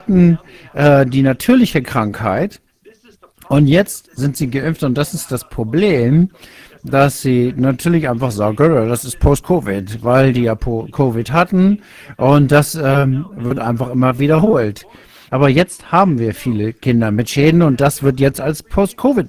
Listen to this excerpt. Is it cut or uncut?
cut